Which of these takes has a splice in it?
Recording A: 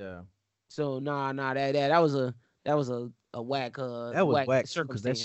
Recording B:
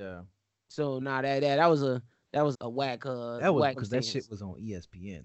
B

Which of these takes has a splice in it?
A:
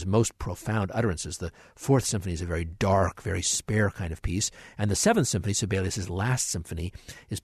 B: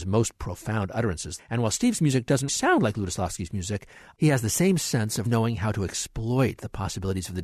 B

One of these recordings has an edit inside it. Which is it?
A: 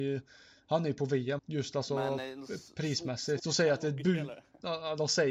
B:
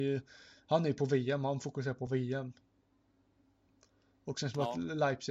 A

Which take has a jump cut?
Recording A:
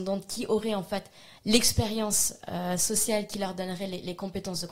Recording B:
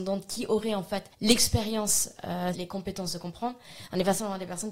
B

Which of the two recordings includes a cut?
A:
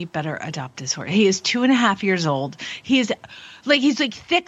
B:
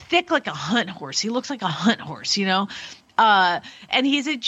A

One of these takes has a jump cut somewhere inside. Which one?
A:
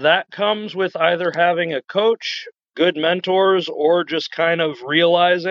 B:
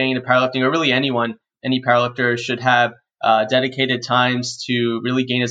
A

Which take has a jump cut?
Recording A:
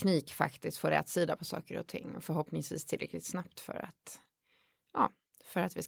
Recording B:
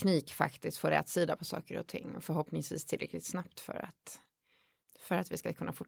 B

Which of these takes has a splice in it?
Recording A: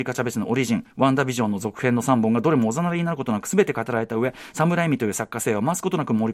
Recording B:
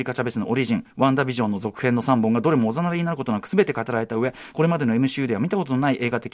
B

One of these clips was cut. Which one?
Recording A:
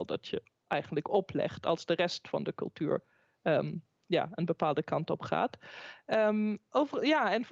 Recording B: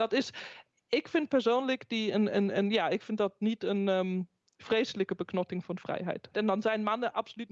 B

